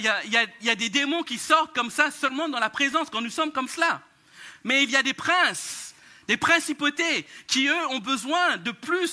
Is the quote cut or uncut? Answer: uncut